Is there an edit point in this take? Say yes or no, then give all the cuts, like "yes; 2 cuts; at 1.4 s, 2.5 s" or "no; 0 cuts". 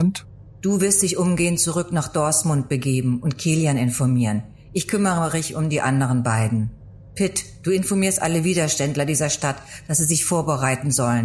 no; 0 cuts